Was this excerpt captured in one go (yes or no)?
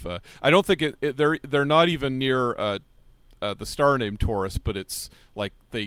yes